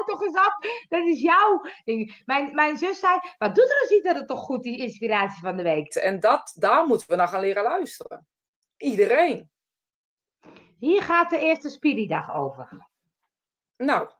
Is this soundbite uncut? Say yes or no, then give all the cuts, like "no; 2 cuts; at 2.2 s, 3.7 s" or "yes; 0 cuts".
no; 1 cut; at 5.9 s